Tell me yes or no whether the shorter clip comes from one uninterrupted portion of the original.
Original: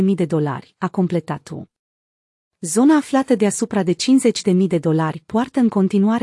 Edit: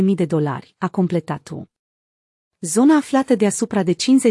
yes